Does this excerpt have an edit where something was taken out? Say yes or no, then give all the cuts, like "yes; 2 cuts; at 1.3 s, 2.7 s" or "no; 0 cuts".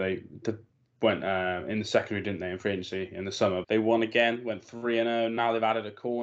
yes; 1 cut; at 3.6 s